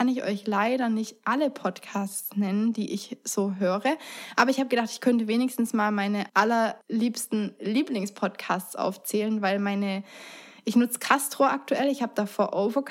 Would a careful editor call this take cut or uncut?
uncut